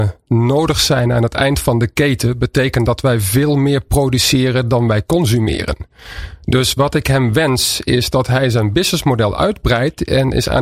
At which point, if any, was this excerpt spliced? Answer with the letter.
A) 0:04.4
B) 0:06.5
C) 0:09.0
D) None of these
D